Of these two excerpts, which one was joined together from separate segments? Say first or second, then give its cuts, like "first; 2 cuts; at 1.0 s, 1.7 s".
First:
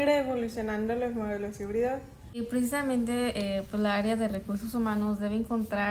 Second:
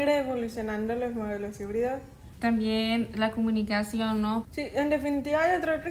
second; 2 cuts; at 2.3 s, 4.4 s